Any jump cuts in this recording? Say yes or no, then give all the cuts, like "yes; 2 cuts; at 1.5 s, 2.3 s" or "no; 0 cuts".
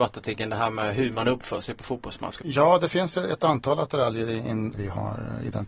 yes; 2 cuts; at 2.4 s, 4.7 s